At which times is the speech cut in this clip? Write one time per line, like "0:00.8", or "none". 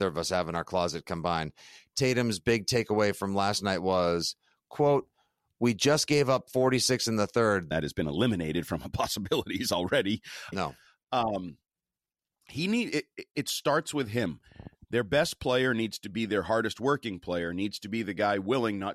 0:07.7
0:10.5